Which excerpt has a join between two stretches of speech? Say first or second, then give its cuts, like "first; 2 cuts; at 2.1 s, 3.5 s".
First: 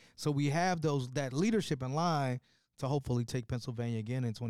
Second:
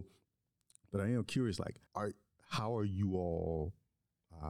second; 1 cut; at 1.9 s